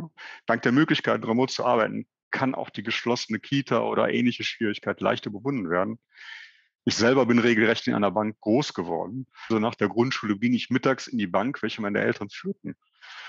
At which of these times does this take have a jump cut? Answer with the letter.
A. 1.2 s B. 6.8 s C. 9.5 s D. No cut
C